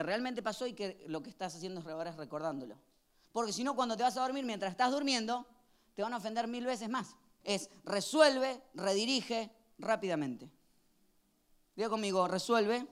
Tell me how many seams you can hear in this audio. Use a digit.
2